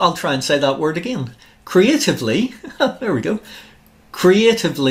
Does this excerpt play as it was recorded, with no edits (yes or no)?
yes